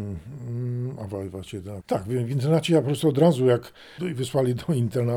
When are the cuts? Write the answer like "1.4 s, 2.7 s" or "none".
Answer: 1.8 s, 4.0 s